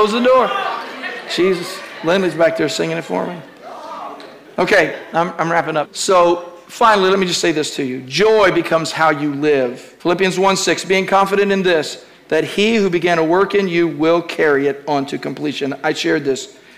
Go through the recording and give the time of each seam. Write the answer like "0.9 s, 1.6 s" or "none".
5.8 s, 10.0 s